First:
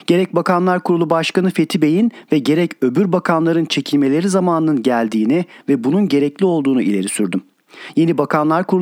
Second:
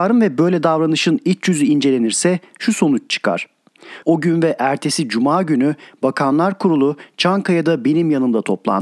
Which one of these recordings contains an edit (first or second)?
second